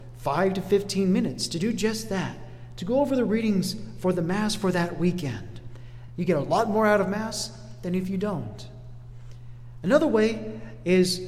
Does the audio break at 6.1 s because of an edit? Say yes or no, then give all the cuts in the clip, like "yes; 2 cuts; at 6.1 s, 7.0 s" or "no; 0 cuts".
no; 0 cuts